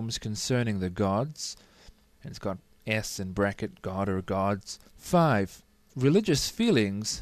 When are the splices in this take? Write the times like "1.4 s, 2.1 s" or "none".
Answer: 2.0 s, 4.9 s

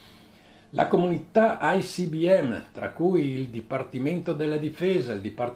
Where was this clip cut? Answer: none

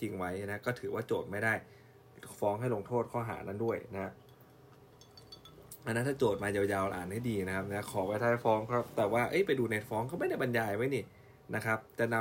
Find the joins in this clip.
none

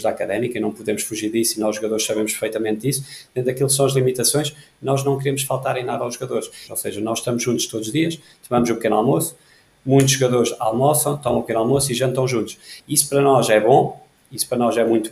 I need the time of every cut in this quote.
6.7 s, 12.8 s

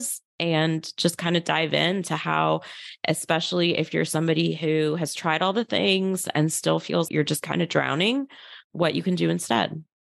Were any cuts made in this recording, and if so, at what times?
7.1 s

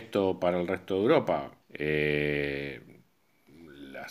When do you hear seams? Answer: 1.6 s

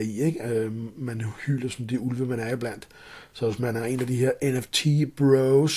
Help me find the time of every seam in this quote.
none

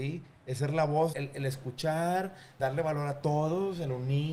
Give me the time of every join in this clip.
1.1 s, 2.6 s

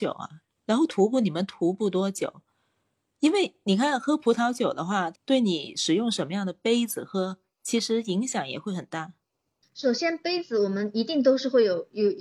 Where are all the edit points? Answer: 5.1 s

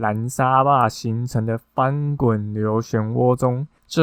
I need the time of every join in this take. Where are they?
none

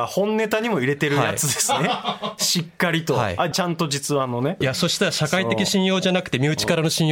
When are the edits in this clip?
3.5 s, 4.6 s

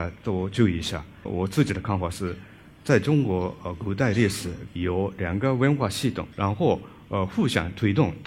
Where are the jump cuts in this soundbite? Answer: 4.7 s, 6.3 s

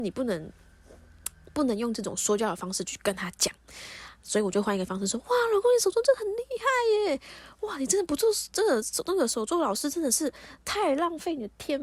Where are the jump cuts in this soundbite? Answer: none

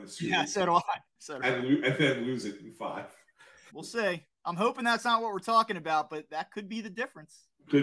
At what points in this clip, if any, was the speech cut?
3.7 s

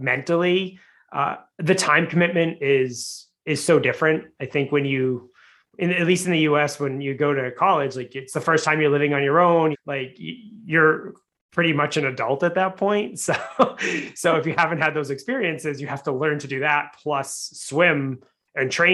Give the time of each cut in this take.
9.7 s

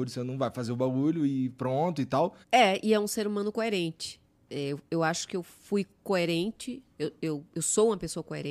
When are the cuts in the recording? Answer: 2.4 s

